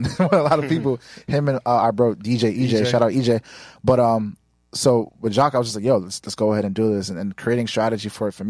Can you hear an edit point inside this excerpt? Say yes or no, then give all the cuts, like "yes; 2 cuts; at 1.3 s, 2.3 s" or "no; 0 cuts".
no; 0 cuts